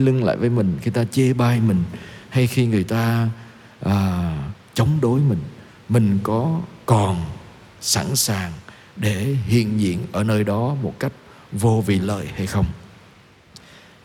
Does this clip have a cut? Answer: no; 0 cuts

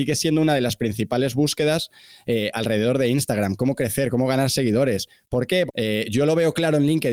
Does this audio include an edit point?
yes; 1 cut; at 5.7 s

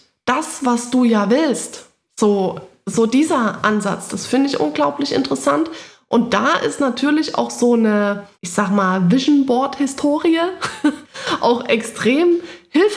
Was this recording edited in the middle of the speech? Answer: yes; 1 cut; at 8.3 s

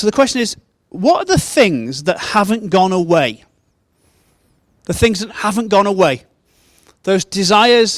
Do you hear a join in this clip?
yes; 1 cut; at 5.3 s

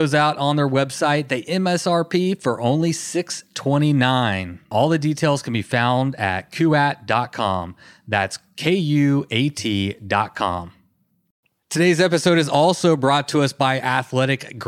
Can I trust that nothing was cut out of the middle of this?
yes; 0 cuts

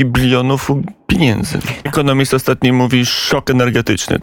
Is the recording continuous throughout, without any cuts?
no; 1 cut; at 1.9 s

